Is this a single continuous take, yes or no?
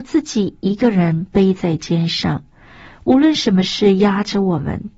yes